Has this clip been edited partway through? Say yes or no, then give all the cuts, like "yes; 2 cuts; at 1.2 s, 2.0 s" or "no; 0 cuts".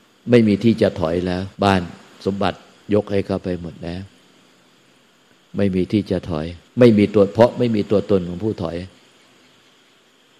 yes; 2 cuts; at 1.5 s, 6.7 s